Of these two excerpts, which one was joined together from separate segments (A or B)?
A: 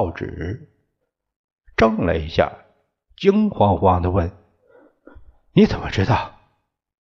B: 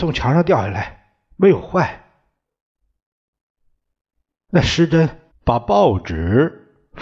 B